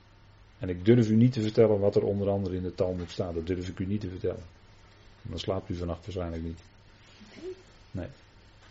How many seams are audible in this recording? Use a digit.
0